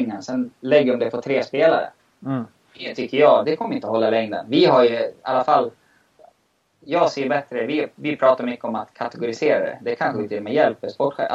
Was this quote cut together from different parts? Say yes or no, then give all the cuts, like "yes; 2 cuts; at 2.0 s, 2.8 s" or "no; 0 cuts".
yes; 1 cut; at 3.4 s